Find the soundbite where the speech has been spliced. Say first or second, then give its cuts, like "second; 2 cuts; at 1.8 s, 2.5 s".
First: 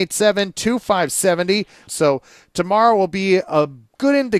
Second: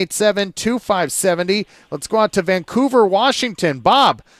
first; 1 cut; at 1.9 s